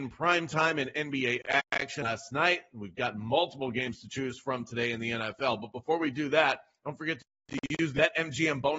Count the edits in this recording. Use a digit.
0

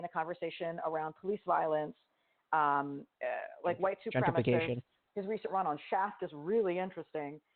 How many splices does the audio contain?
2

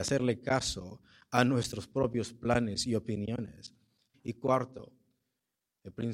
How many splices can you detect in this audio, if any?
1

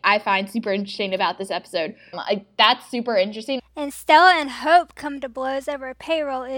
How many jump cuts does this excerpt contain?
2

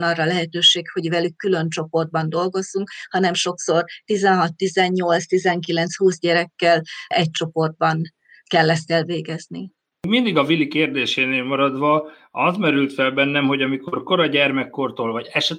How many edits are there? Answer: 0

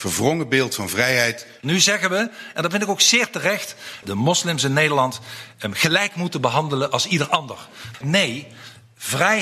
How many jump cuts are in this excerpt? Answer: 3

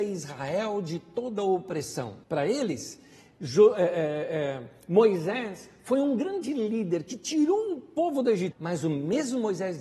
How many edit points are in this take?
2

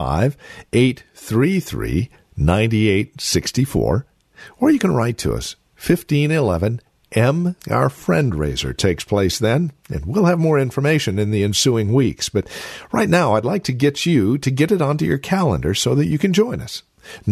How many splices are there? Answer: 1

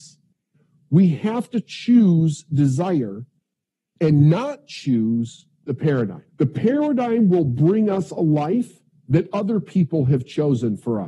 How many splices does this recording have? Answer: 1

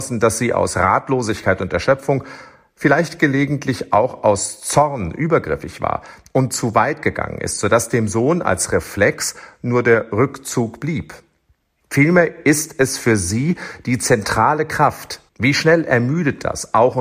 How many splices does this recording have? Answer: 2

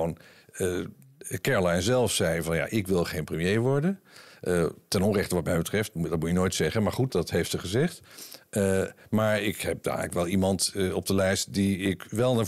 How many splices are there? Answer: 1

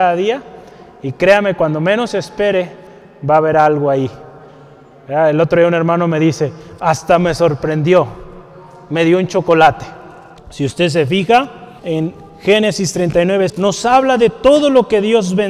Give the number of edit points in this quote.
3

